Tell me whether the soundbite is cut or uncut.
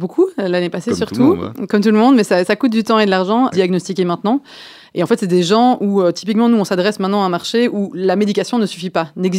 cut